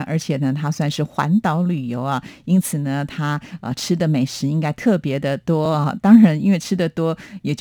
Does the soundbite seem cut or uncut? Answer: uncut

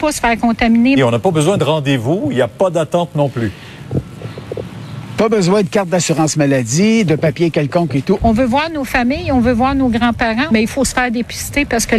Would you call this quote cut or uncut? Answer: cut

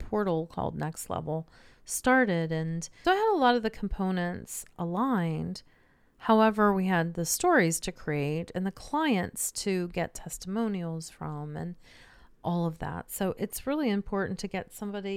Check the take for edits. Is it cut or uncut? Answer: cut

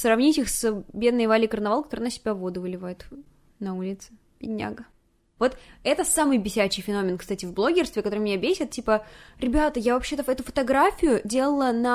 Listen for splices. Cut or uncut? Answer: cut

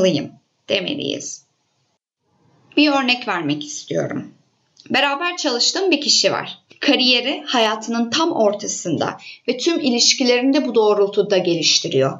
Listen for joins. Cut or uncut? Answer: uncut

